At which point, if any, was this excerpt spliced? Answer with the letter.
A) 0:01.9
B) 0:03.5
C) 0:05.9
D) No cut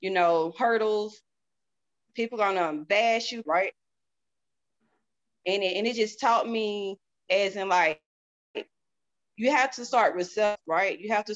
B